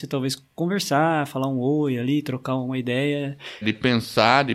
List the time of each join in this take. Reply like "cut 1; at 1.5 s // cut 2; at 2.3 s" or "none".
cut 1; at 3.6 s